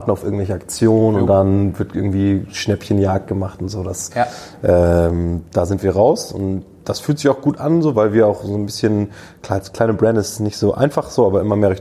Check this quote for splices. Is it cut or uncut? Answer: uncut